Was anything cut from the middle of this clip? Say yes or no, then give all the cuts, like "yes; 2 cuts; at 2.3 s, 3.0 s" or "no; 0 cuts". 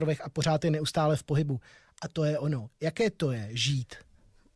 no; 0 cuts